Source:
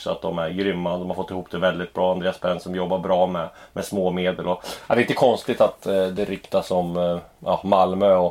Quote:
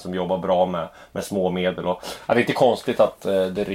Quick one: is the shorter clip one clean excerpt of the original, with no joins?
yes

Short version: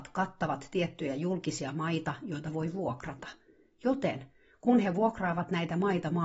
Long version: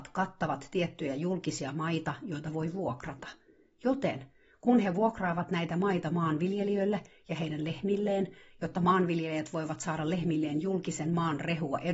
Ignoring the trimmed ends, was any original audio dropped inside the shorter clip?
no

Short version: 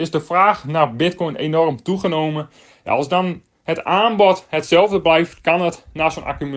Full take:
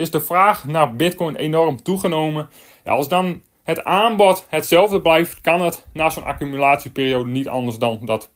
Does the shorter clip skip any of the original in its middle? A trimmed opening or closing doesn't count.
no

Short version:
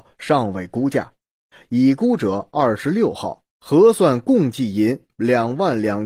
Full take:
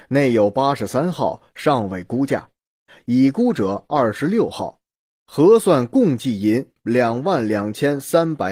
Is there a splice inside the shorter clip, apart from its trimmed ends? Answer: yes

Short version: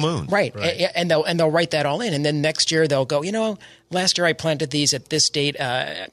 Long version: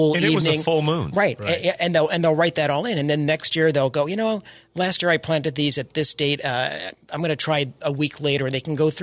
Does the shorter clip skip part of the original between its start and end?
no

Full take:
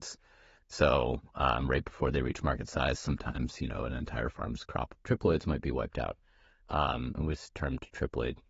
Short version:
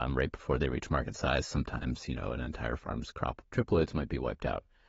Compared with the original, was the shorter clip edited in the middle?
no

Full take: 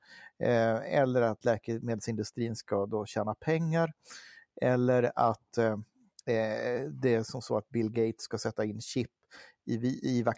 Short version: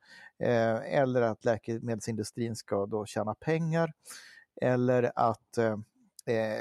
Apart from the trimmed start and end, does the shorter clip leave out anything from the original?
no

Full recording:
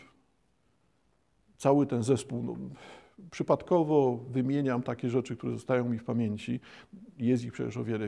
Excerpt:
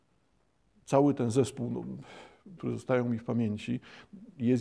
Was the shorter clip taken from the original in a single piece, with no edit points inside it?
no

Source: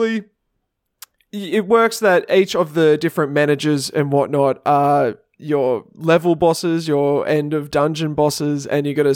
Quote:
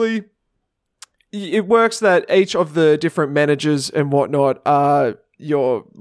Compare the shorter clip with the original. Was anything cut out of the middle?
no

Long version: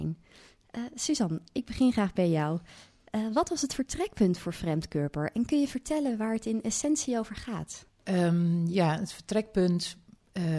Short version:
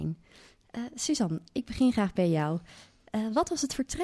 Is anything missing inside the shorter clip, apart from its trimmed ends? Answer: no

